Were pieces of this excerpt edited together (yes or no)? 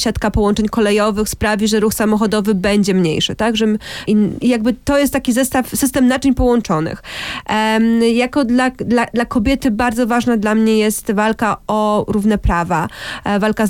yes